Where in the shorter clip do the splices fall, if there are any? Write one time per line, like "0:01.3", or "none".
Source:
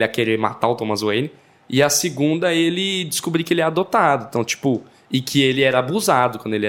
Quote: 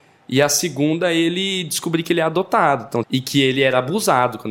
0:03.0